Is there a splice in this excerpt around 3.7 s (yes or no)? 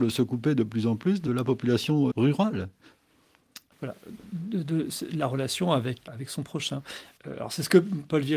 yes